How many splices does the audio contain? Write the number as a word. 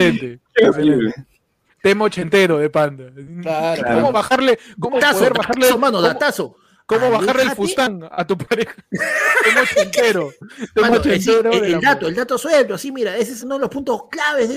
one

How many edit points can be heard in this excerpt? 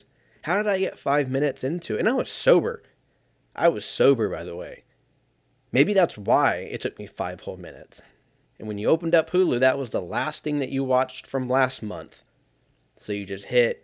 one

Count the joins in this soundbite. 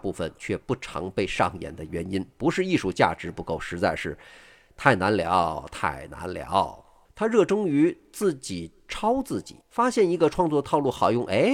two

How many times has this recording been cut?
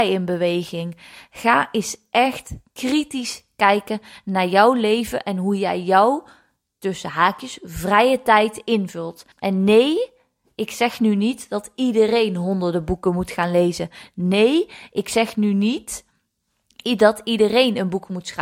one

